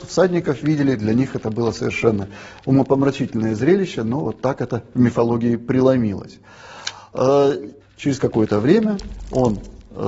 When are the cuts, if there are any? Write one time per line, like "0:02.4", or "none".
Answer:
0:07.8